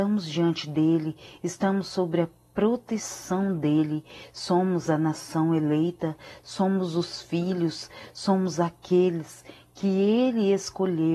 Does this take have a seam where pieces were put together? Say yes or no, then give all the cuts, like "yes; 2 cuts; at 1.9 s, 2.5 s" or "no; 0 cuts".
no; 0 cuts